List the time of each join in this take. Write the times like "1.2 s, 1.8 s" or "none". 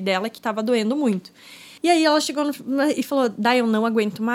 1.8 s